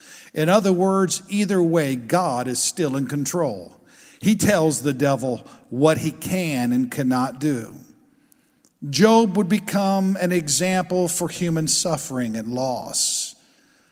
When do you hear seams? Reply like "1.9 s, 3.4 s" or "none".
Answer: none